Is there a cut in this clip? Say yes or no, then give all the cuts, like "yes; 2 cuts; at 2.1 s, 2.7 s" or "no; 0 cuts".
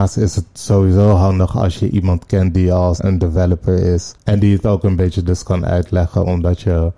yes; 1 cut; at 3.0 s